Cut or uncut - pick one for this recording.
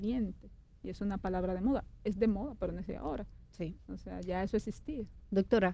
uncut